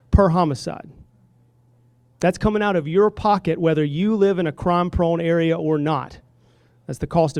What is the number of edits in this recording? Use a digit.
0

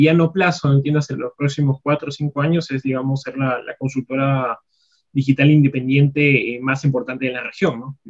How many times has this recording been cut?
0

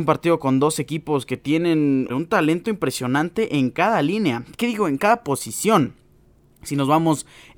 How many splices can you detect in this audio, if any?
1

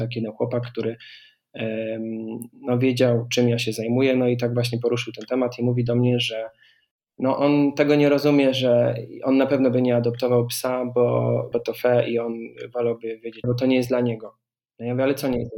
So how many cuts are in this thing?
2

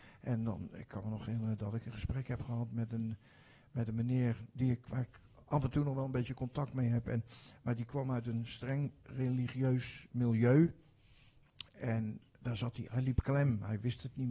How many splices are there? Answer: 2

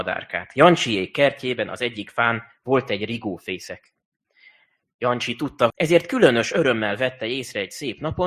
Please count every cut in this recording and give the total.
1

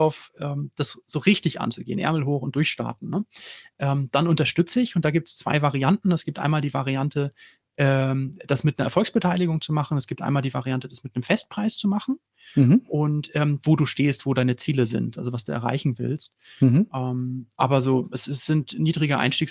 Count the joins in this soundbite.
1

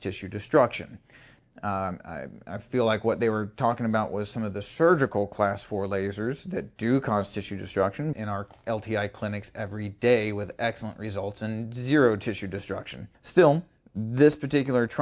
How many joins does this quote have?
3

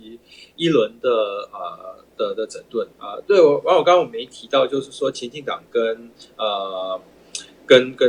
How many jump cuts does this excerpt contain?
1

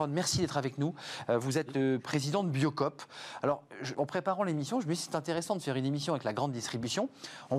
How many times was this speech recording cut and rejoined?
1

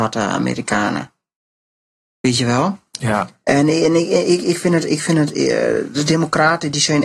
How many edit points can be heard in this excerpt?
0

